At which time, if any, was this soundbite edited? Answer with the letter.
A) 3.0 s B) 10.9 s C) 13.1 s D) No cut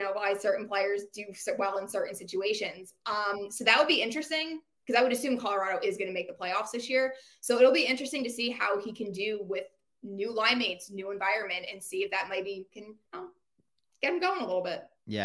C